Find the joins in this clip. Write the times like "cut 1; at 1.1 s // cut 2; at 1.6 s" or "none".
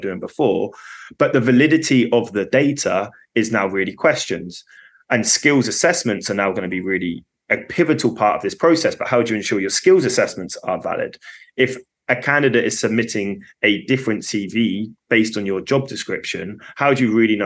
none